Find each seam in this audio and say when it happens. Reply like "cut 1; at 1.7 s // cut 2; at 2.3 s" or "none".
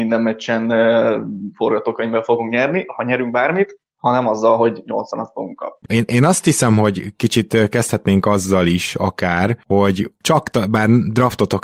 cut 1; at 5.8 s